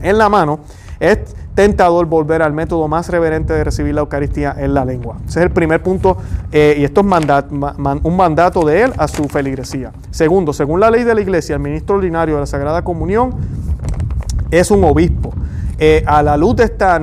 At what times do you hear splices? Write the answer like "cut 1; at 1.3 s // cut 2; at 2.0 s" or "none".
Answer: none